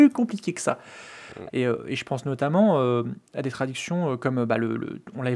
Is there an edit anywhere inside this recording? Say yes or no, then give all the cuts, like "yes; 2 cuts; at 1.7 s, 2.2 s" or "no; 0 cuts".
yes; 1 cut; at 1.5 s